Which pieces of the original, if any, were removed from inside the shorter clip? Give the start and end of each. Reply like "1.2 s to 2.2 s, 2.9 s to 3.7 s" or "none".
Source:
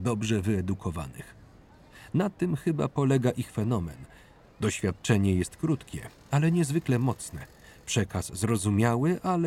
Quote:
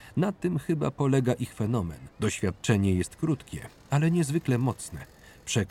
4.1 s to 4.5 s